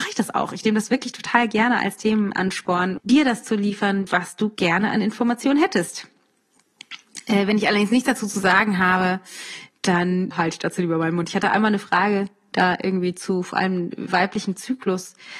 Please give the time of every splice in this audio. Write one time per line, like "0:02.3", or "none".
0:03.0
0:04.1
0:10.3